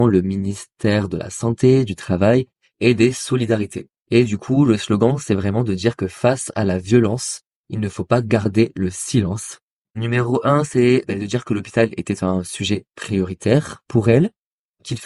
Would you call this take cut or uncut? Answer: cut